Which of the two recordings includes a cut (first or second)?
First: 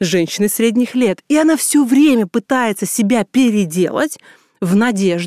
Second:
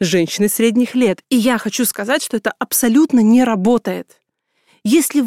second